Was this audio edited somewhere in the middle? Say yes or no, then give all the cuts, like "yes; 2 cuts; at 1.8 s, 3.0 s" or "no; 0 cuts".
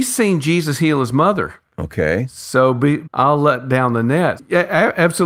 yes; 2 cuts; at 3.0 s, 4.4 s